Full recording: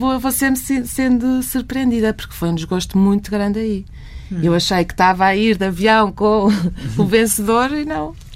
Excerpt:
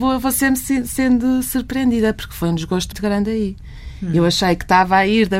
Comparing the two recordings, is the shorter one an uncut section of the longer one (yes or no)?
no